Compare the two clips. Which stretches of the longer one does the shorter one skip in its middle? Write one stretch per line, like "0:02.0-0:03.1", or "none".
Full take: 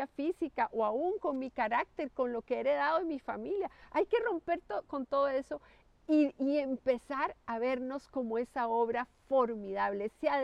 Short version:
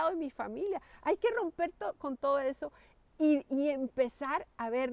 none